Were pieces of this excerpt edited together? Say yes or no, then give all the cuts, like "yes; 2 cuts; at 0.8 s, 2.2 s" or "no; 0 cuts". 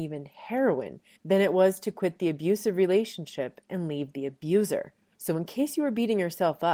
yes; 1 cut; at 1.2 s